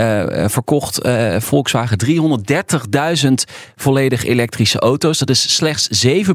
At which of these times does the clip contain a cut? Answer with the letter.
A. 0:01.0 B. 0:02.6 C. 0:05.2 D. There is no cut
D